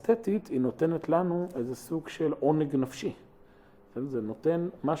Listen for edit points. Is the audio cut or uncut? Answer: uncut